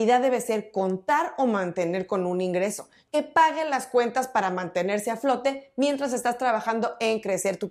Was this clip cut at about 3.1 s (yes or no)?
yes